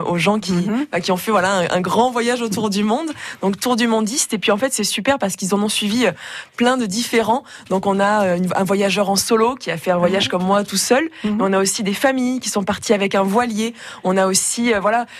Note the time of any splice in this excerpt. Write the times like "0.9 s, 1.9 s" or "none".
none